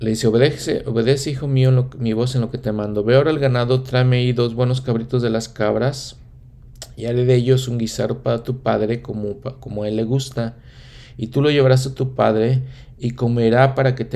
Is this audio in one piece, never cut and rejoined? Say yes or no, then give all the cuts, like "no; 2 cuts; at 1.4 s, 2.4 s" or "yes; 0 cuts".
yes; 0 cuts